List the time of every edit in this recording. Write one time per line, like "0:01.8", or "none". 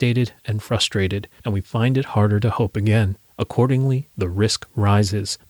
none